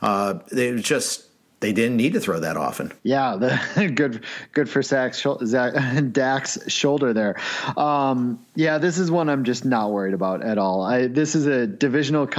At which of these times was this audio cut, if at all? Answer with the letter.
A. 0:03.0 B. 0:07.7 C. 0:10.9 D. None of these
A